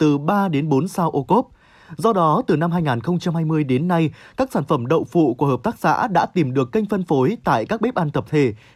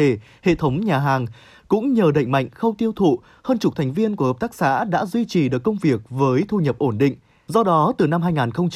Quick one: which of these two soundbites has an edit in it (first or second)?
second